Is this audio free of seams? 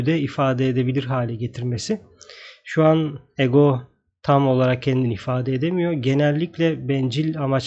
yes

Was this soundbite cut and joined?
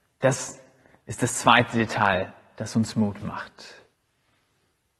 no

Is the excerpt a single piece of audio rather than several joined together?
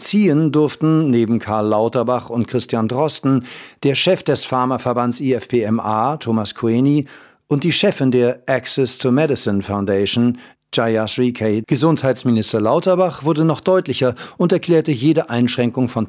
no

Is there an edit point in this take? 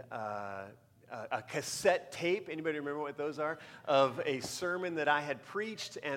no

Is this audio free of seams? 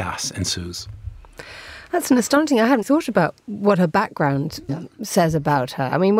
no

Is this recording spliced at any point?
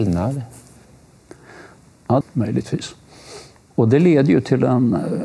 yes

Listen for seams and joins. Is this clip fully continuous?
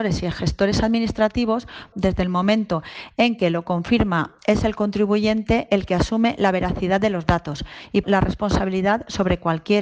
no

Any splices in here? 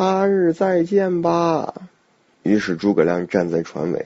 yes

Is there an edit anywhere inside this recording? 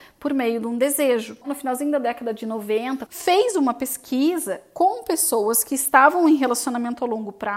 yes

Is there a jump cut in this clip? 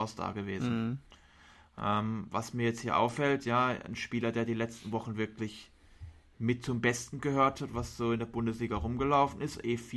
no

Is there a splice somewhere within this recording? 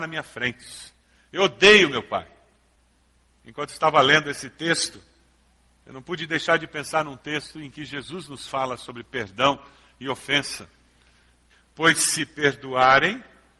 no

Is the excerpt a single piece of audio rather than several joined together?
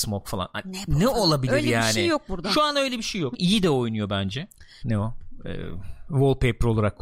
no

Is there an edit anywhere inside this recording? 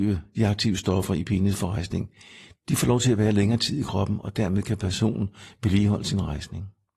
no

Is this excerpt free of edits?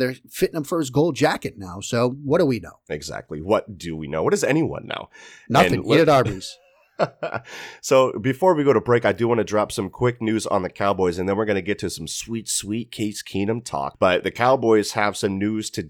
yes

